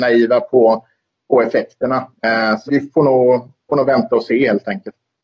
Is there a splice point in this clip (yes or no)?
yes